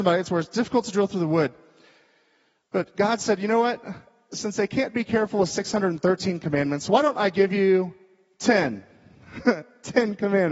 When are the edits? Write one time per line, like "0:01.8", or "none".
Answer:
none